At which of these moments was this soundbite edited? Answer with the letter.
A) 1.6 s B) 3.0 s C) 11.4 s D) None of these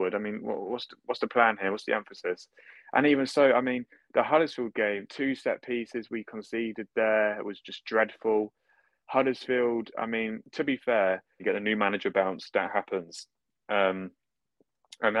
C